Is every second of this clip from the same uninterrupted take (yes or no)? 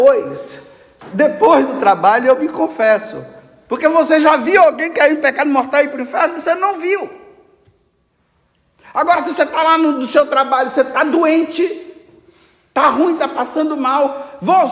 yes